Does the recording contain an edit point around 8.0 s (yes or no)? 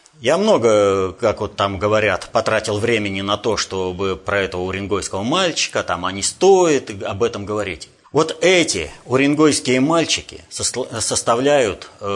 yes